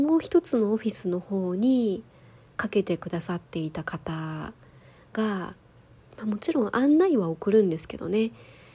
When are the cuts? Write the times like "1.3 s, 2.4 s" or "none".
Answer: none